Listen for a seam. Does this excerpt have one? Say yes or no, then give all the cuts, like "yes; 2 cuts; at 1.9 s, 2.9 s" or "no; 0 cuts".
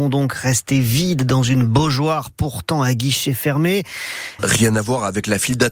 yes; 1 cut; at 4.4 s